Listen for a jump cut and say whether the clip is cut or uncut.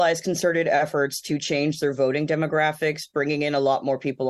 uncut